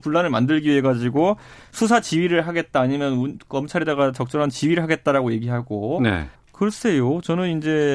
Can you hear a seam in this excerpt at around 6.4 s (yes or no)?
yes